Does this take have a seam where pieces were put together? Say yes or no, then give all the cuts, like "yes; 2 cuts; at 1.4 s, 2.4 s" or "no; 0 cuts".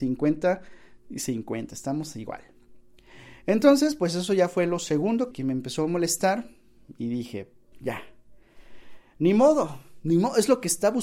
yes; 2 cuts; at 5.3 s, 7.7 s